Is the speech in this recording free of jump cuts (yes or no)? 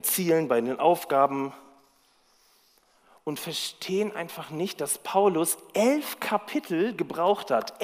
yes